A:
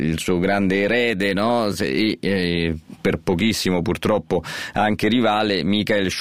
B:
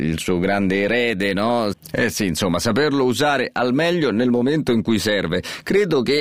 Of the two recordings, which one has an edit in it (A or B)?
B